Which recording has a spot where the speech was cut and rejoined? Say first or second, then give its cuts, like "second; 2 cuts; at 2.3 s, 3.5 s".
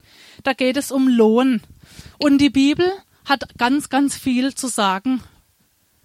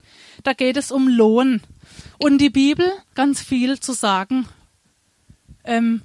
second; 1 cut; at 3.1 s